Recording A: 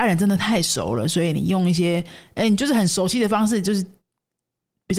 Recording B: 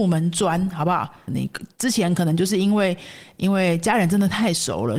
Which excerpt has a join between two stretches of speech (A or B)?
B